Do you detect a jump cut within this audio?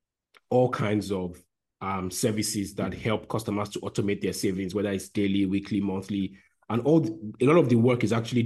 no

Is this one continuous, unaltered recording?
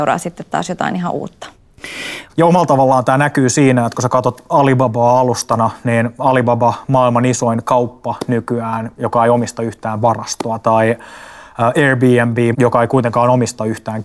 no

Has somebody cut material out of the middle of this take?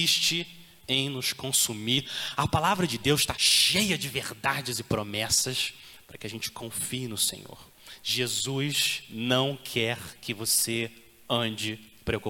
yes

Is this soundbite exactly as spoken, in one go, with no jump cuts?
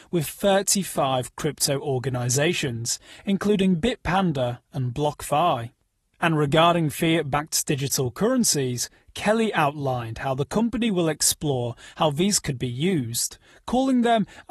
yes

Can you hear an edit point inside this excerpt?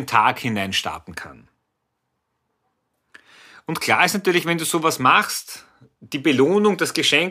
no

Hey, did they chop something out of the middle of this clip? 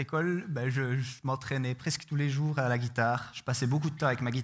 no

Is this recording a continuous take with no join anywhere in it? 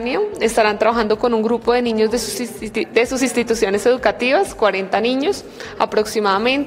yes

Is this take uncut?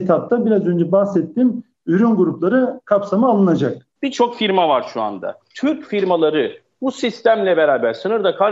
no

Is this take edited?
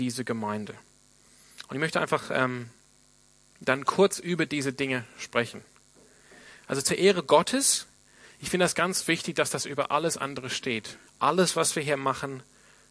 yes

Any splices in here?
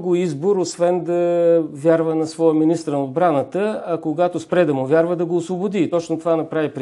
no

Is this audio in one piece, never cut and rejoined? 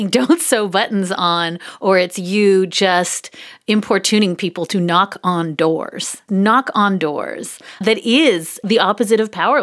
no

